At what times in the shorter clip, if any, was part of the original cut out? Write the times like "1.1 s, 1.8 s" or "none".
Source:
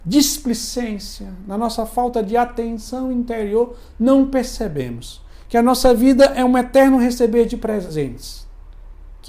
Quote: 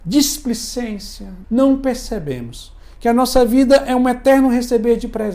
1.4 s

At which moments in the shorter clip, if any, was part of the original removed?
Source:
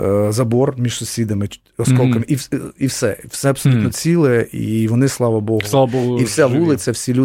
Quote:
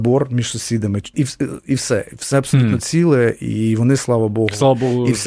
1.1 s

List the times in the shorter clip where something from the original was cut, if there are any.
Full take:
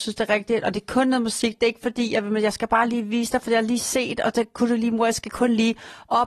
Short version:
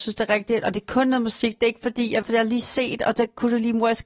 2.2 s

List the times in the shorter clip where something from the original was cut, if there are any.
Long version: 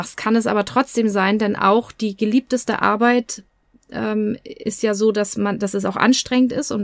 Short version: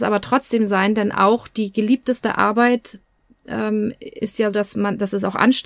4.5 s

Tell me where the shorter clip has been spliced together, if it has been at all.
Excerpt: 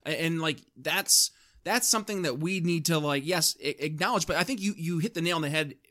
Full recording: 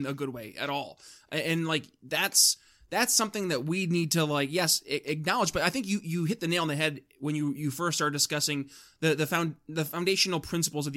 none

